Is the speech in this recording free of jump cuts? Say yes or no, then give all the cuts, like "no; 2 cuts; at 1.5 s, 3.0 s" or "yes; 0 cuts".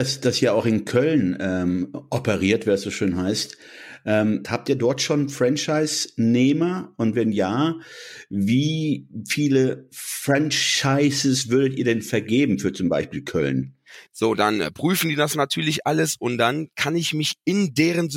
no; 2 cuts; at 4.4 s, 14.1 s